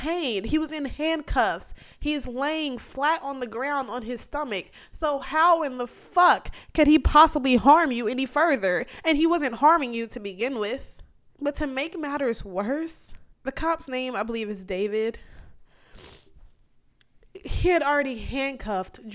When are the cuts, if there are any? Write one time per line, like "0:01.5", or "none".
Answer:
0:11.4
0:13.3